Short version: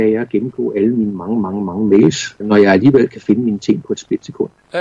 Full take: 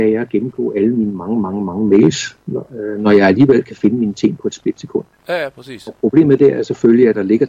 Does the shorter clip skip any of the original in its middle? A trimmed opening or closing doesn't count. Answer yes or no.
yes